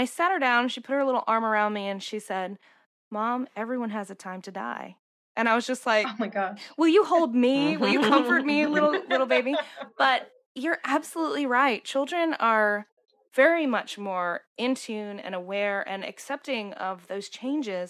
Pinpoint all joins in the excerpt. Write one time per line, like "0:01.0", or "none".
none